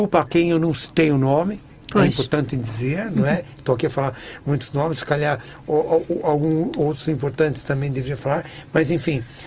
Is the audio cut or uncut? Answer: uncut